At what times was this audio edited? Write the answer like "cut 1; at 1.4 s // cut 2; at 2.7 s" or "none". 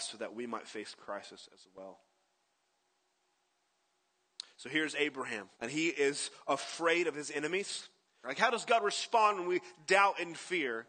cut 1; at 5.5 s // cut 2; at 8.2 s